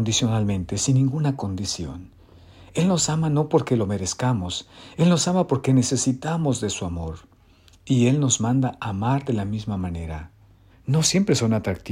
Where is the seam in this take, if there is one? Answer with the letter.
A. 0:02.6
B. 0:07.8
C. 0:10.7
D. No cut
C